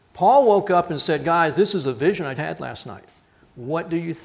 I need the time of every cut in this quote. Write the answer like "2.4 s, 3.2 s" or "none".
2.4 s

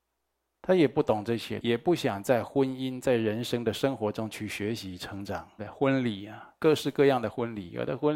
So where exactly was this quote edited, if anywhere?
1.6 s, 5.6 s

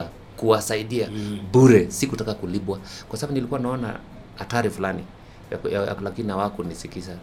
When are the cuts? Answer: 6.0 s

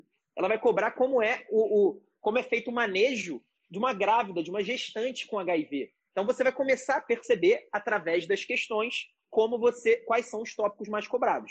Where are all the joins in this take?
none

